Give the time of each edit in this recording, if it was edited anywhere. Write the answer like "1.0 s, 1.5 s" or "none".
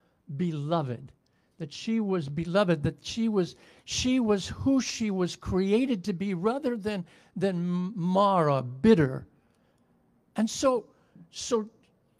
none